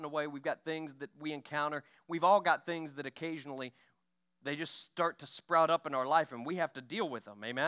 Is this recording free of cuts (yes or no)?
yes